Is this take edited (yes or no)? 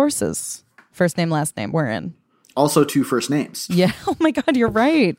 no